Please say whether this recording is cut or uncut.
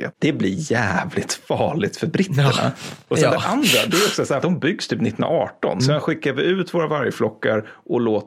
cut